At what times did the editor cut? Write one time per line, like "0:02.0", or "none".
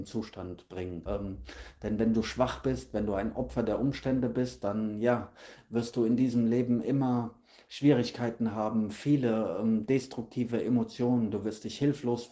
0:01.1

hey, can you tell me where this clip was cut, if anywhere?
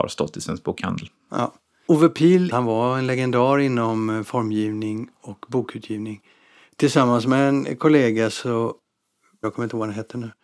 0:09.4

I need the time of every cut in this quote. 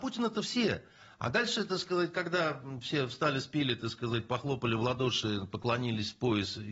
none

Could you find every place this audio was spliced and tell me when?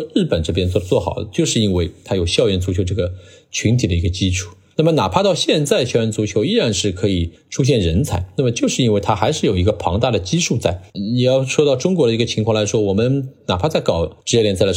0:10.9

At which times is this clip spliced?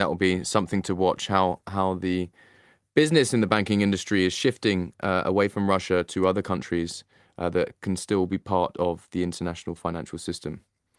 none

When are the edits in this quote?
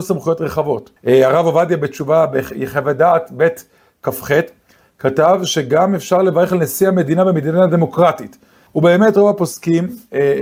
0:01.0
0:08.7

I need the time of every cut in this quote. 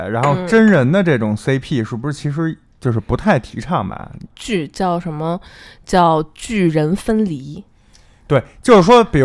0:04.3

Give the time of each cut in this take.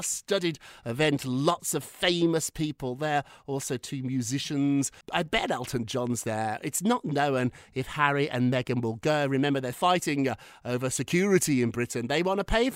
0:05.0
0:09.7

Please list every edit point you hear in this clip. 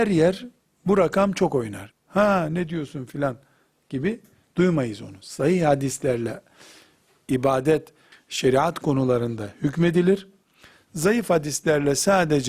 0:01.9
0:08.1

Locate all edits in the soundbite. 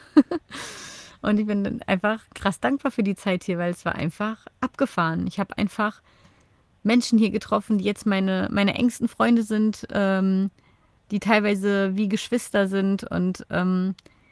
none

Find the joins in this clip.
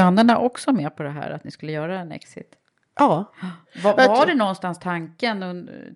0:03.6

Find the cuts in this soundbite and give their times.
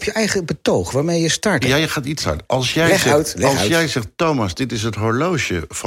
0:01.6

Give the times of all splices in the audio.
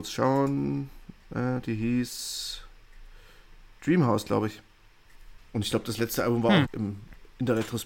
0:05.4
0:06.6

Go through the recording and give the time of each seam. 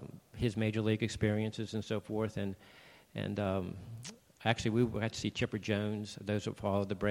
none

